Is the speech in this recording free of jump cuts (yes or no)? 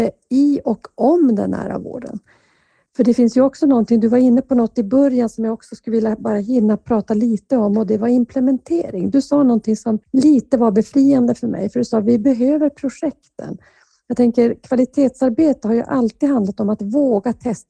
no